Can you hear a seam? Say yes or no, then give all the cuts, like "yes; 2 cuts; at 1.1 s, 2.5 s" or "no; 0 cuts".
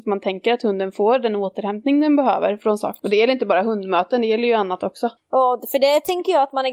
yes; 2 cuts; at 3.0 s, 5.2 s